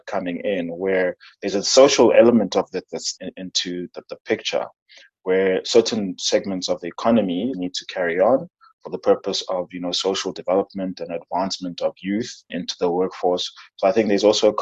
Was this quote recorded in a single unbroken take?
no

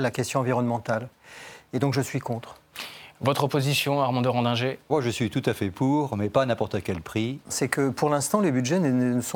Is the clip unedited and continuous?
no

